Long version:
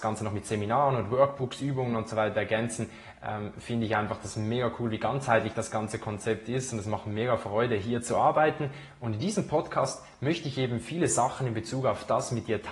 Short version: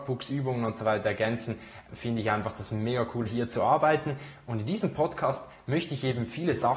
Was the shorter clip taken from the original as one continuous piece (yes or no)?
no